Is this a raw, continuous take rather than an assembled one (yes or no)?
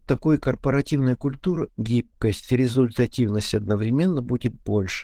no